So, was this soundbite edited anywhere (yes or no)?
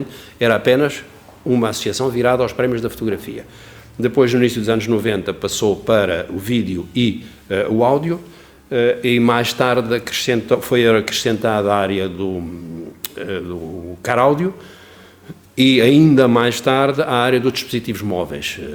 no